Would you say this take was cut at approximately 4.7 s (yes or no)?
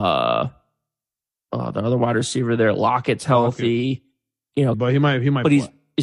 yes